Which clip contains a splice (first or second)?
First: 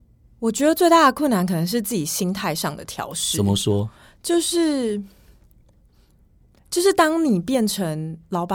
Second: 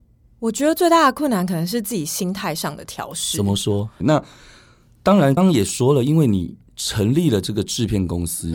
second